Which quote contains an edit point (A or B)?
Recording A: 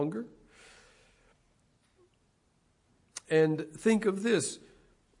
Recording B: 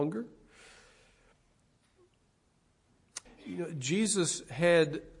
B